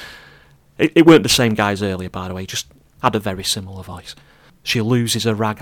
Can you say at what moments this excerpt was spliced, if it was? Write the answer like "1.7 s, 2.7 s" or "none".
4.5 s

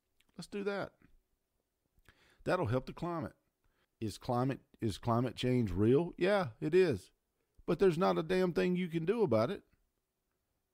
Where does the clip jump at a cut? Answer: 3.8 s

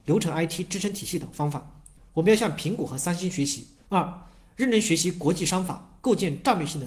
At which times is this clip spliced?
2.0 s, 3.9 s

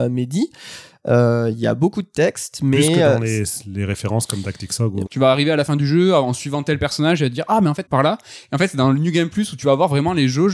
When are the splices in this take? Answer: 5.1 s, 7.9 s

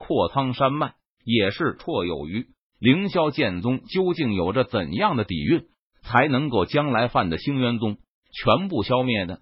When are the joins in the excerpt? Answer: 1.8 s

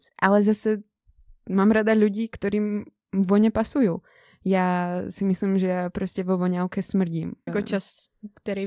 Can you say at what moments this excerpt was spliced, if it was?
7.5 s

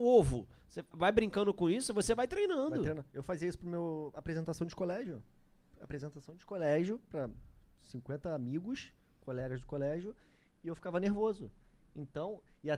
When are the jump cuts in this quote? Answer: 0.9 s

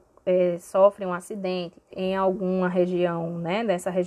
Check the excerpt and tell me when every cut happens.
1.9 s

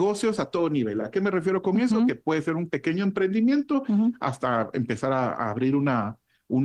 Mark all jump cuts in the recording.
none

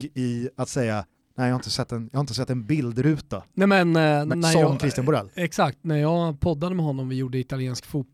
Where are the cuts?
4.3 s

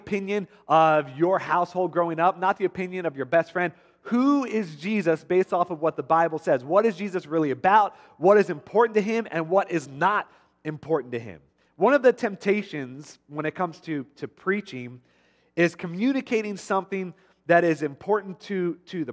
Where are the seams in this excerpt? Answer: none

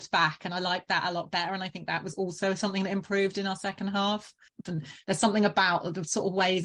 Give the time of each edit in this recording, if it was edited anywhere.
4.7 s

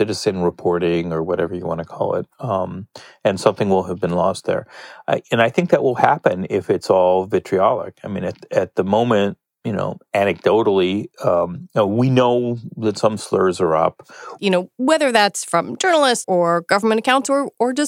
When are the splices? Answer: 14.4 s, 16.2 s

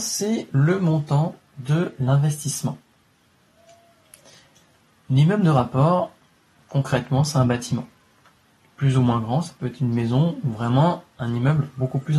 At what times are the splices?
none

